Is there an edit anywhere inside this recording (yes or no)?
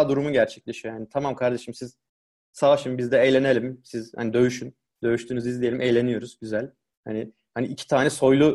no